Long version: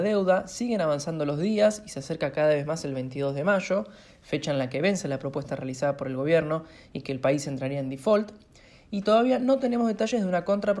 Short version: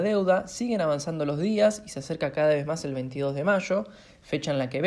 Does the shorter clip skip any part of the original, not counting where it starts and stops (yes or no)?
no